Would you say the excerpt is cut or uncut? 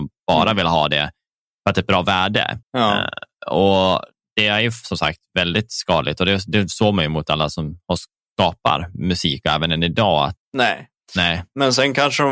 cut